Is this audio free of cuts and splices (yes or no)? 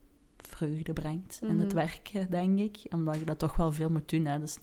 yes